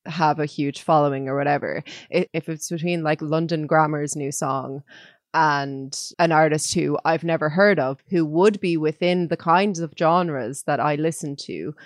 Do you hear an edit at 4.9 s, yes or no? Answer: no